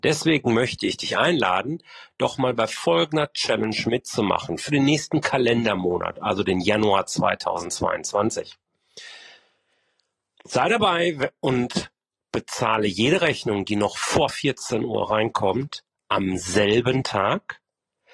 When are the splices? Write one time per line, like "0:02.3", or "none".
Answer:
none